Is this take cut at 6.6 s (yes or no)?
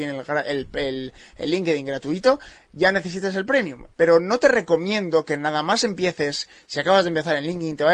no